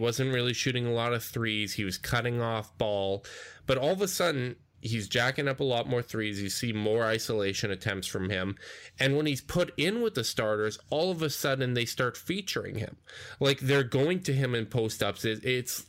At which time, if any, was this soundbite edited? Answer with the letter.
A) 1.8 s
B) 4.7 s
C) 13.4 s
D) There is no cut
B